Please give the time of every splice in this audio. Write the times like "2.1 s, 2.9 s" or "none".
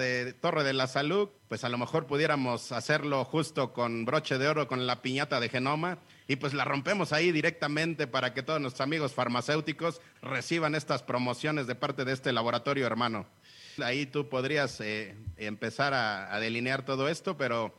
1.4 s, 13.8 s